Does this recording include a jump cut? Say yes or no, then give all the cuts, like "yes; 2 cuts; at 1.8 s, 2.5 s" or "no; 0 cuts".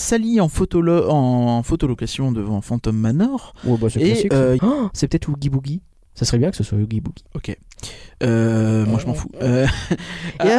yes; 2 cuts; at 4.6 s, 7.3 s